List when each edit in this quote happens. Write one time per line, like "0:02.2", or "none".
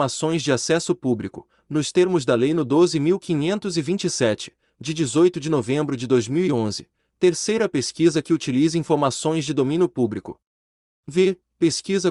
0:11.0